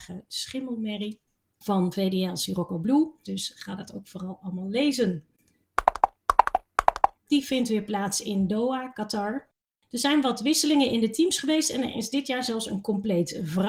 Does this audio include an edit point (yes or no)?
yes